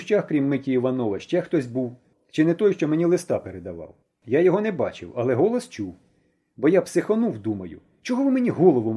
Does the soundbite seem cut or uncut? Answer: uncut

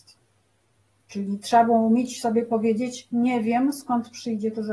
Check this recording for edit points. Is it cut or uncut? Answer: uncut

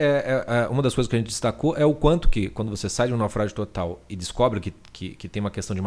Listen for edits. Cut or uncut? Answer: uncut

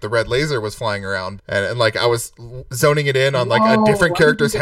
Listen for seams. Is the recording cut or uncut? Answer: cut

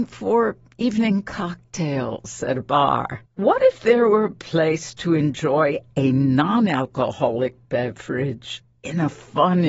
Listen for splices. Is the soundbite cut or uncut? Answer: cut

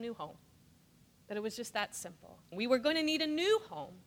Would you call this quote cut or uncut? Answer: cut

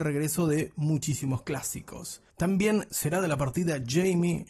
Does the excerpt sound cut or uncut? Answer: cut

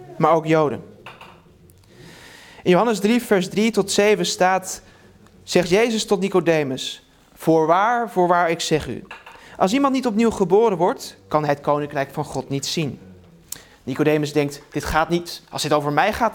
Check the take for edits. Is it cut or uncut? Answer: uncut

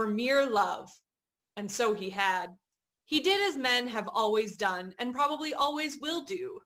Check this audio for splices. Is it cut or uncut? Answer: cut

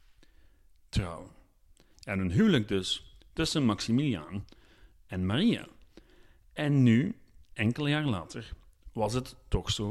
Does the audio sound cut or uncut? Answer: cut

